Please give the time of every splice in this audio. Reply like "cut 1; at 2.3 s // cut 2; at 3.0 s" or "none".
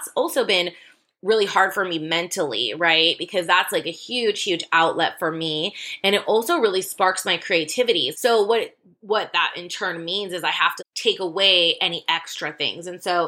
cut 1; at 8.1 s // cut 2; at 10.8 s